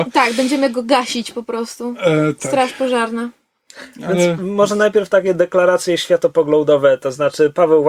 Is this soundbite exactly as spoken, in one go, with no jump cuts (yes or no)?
yes